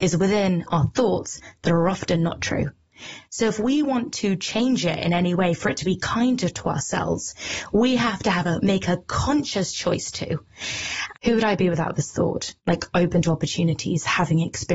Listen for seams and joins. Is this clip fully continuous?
no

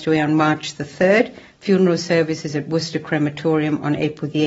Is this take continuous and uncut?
no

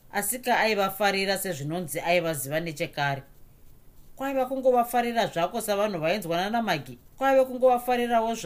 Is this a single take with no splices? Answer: no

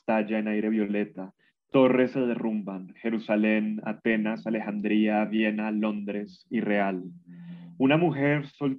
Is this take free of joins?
yes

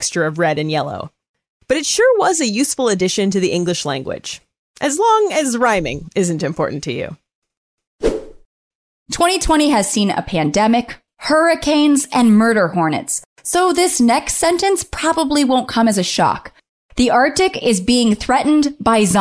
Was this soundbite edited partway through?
no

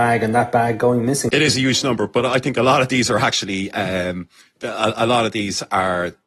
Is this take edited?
yes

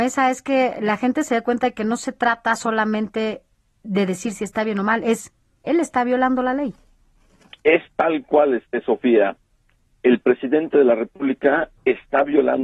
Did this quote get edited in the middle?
no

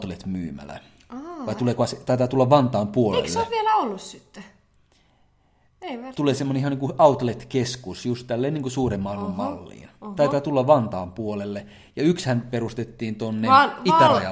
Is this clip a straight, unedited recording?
yes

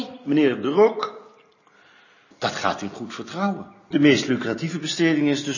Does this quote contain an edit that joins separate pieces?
yes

